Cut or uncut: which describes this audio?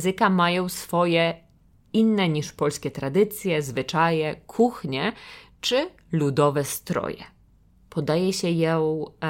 cut